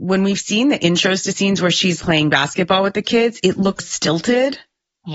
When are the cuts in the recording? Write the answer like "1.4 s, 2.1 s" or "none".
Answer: 2.0 s, 3.8 s

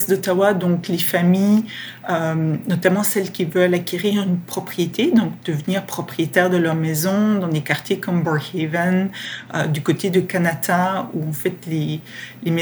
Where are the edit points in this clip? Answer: none

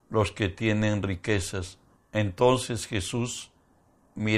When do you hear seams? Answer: 2.0 s

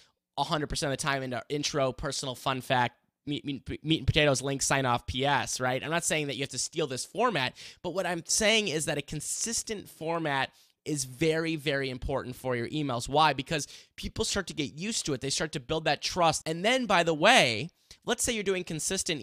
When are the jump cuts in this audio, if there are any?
16.4 s

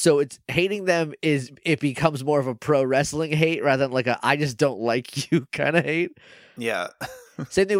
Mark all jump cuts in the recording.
none

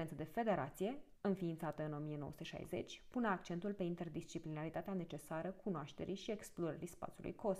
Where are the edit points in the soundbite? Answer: 1.2 s

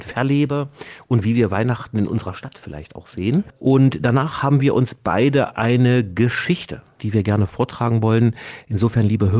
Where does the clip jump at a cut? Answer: 7.0 s

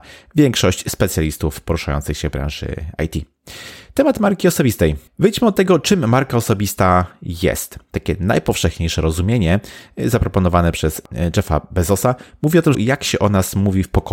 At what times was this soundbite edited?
5.1 s, 12.7 s

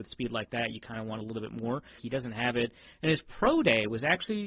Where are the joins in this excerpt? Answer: 2.0 s

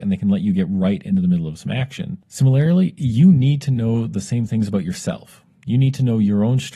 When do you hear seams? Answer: 2.2 s

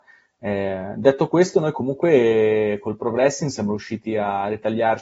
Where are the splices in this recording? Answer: none

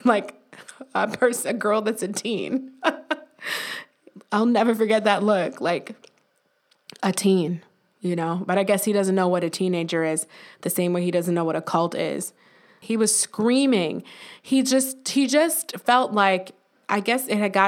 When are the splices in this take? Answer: 12.8 s

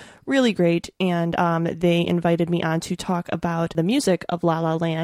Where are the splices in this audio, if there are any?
none

